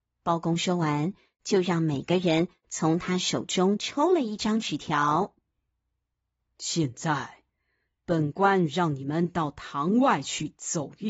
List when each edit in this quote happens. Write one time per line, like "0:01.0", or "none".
none